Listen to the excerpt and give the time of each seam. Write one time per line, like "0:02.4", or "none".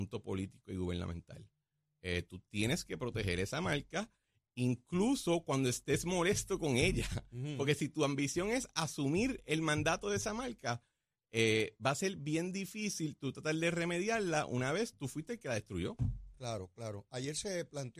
none